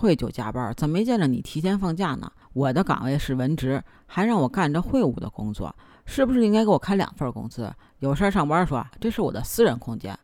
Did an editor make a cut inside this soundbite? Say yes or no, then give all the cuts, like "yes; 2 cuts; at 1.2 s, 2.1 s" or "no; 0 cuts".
yes; 2 cuts; at 2.4 s, 8.9 s